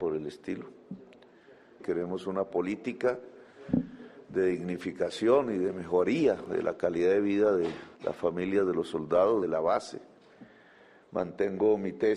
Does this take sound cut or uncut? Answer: cut